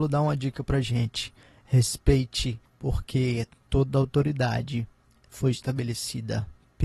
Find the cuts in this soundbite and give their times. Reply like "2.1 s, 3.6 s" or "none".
2.7 s